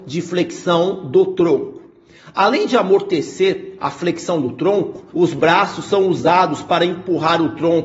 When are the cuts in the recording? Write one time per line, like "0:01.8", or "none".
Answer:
0:05.1